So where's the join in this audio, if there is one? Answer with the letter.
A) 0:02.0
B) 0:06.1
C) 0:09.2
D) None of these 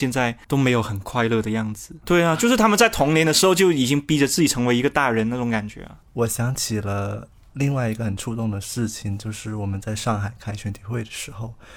D